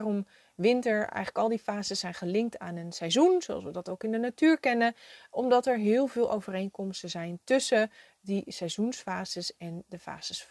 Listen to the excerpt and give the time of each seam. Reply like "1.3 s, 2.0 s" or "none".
none